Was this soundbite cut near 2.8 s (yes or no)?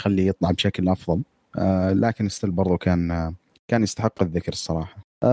no